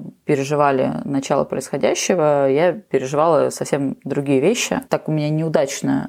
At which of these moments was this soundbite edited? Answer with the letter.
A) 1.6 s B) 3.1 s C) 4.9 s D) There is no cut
C